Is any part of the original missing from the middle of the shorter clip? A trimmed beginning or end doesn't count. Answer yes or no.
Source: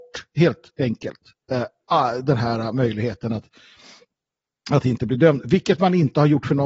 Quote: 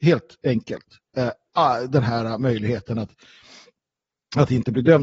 no